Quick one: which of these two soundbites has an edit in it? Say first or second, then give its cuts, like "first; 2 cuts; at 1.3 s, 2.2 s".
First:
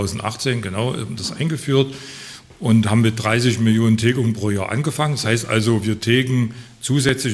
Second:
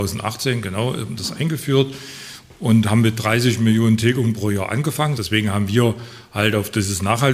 second; 1 cut; at 5.2 s